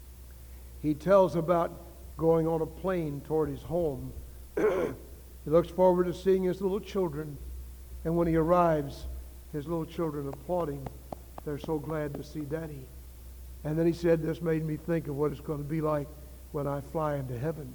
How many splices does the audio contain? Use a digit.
0